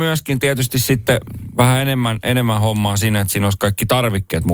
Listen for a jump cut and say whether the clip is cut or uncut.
uncut